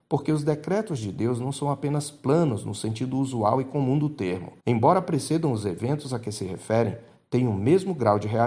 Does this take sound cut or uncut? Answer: cut